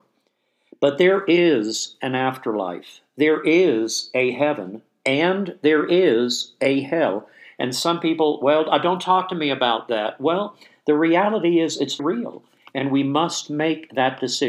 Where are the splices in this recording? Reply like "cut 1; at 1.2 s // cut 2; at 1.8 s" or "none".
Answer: cut 1; at 12.0 s